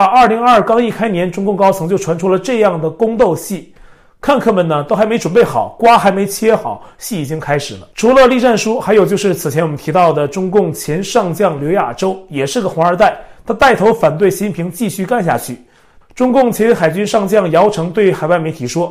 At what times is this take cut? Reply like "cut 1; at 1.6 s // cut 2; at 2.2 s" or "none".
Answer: cut 1; at 7.9 s // cut 2; at 16.0 s